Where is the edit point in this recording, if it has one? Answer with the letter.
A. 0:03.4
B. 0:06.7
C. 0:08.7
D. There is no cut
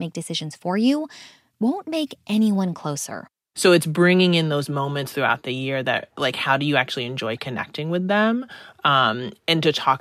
D